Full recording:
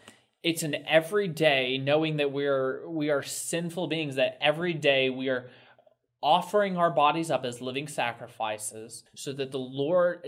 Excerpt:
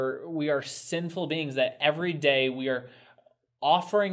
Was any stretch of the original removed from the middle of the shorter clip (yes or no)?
no